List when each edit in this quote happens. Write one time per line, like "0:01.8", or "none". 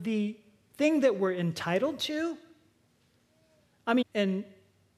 0:04.0